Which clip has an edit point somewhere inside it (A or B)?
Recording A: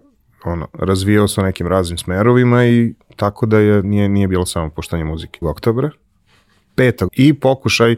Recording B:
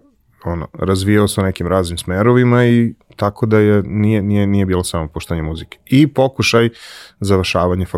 A